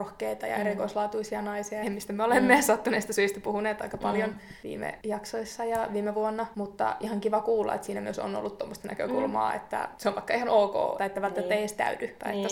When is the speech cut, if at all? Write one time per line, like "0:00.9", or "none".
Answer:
0:01.8
0:11.0